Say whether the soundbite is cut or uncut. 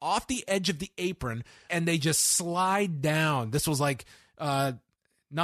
cut